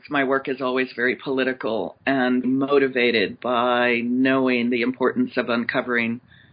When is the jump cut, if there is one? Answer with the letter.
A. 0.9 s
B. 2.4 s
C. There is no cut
B